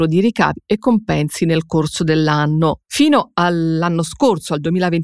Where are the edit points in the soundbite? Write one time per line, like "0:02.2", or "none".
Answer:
0:02.9